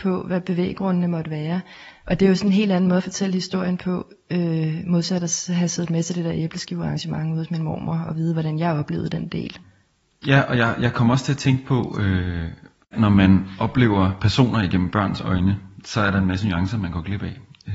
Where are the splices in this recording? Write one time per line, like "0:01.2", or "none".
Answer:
none

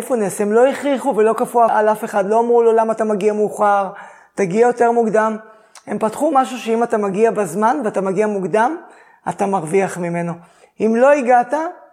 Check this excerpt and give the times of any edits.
none

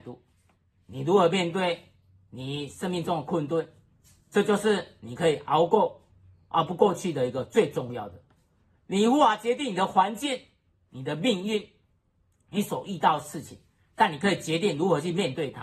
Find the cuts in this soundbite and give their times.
none

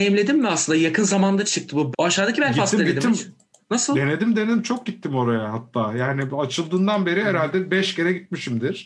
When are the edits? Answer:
0:01.9

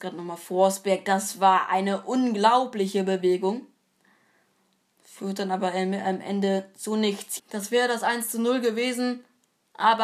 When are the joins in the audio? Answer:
0:07.4

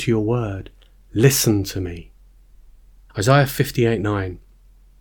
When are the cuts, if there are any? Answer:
0:03.1

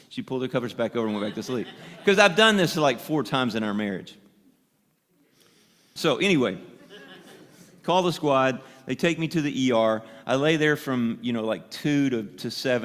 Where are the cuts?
0:06.0

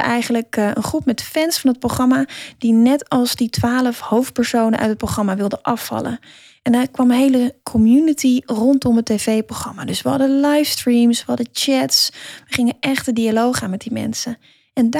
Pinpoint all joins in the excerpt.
none

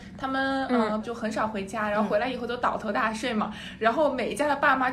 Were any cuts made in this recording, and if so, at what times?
0:01.0

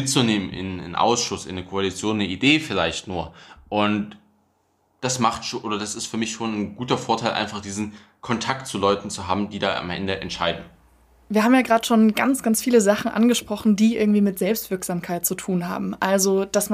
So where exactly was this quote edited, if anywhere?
none

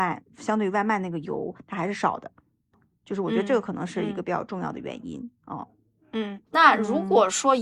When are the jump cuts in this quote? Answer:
0:06.5

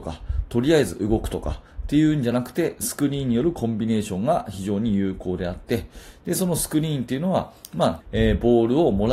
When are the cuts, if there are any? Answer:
0:08.0

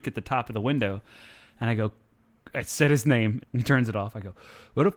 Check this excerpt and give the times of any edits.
0:03.4

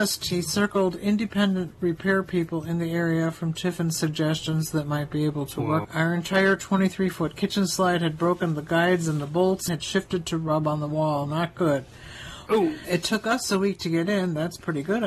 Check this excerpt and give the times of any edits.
0:05.8
0:09.7
0:12.5

